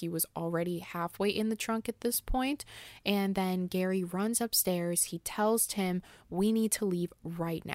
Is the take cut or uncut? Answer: uncut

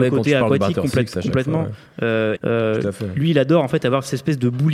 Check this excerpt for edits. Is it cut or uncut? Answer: cut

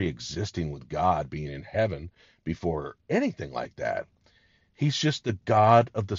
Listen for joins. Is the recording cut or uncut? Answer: uncut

